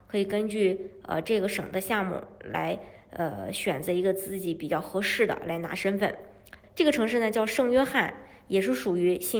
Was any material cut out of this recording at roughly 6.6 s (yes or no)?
yes